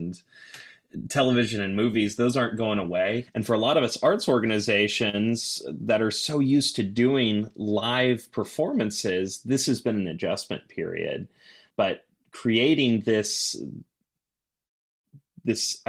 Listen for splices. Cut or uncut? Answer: cut